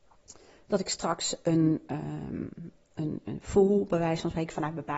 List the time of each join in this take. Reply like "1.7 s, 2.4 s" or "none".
none

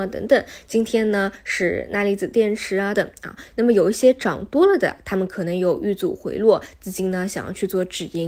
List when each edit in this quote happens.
2.9 s

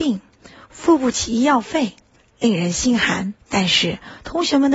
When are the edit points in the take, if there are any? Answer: 3.4 s

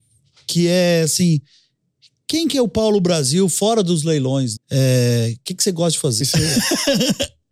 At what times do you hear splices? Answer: 4.6 s, 6.2 s

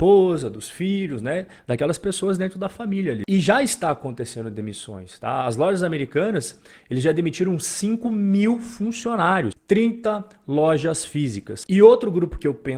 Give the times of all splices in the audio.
9.5 s, 11.7 s

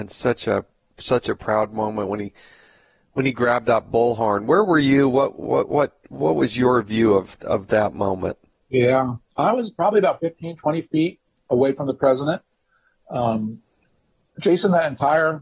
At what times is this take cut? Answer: none

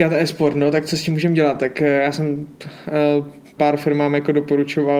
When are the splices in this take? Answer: 3.6 s

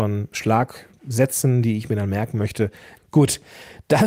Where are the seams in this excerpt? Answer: 3.0 s

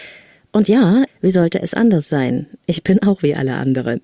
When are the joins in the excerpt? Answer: 1.1 s

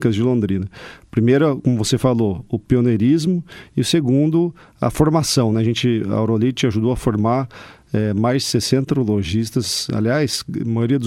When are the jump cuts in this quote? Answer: none

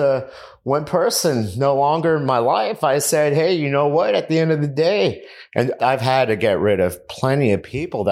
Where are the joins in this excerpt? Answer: 5.8 s

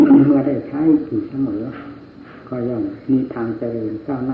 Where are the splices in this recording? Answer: none

